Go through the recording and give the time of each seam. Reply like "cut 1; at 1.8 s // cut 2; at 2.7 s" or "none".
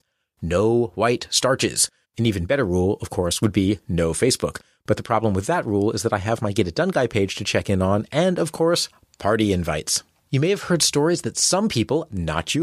cut 1; at 2.0 s // cut 2; at 10.2 s